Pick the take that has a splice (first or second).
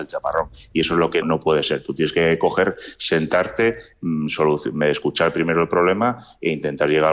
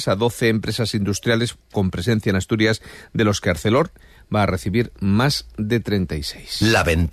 first